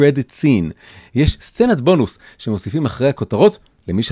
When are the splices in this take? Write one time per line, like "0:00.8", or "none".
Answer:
none